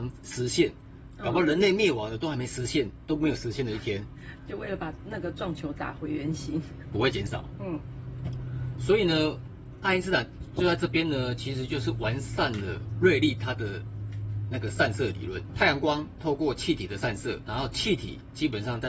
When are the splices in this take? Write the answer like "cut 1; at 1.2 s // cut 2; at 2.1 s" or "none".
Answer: cut 1; at 6.9 s